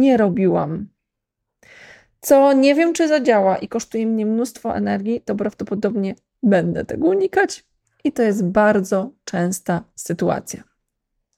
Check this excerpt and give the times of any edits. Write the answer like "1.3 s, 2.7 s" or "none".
none